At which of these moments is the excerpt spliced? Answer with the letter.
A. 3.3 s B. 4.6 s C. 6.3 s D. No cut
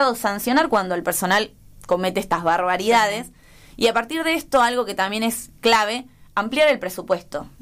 D